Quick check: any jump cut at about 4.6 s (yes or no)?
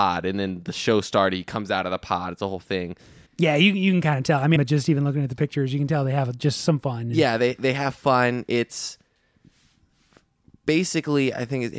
yes